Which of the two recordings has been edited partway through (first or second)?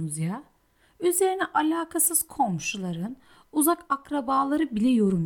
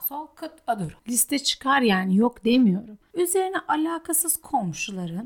second